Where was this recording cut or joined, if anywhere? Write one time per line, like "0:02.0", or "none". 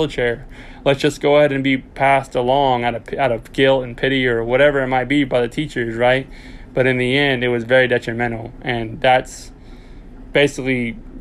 none